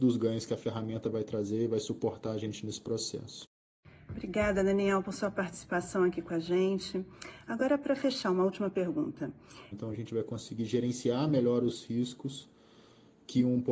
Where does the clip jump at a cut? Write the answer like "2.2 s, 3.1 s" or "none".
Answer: 9.7 s

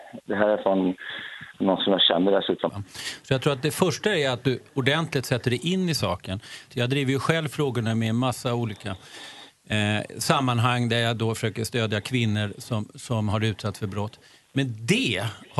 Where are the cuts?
2.7 s, 6.7 s

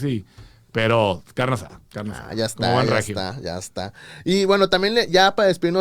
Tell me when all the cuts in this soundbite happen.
none

